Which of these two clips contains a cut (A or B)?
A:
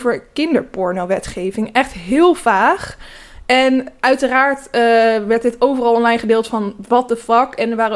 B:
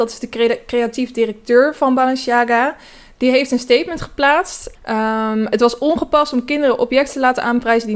B